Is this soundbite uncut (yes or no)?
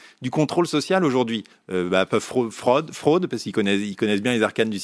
no